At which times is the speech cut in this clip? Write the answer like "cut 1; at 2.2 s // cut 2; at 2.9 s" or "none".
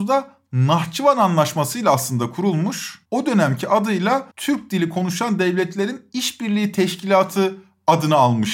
cut 1; at 4.3 s